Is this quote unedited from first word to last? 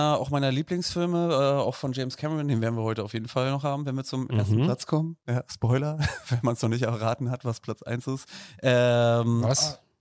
yes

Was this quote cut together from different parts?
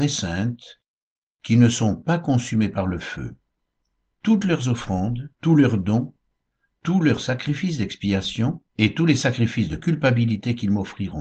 yes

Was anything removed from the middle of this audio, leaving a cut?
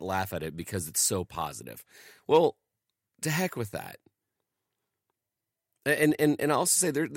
no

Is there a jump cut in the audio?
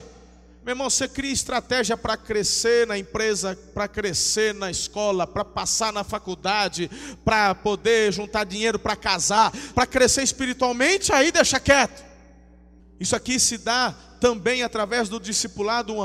yes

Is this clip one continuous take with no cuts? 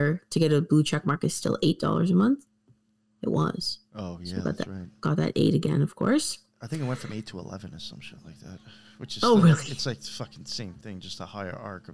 yes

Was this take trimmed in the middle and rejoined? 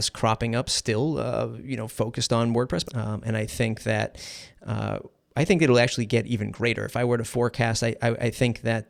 yes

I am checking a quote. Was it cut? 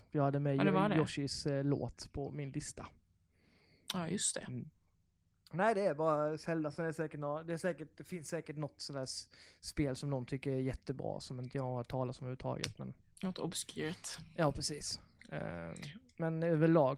no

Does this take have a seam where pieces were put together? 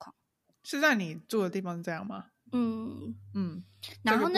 yes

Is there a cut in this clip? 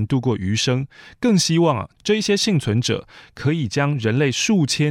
no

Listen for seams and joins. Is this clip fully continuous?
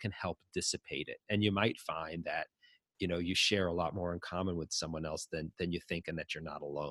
yes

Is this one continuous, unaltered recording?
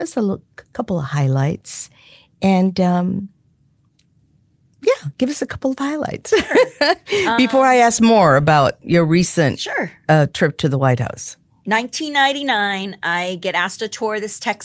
yes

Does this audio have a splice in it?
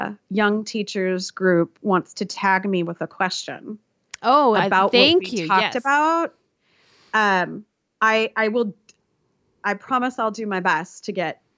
no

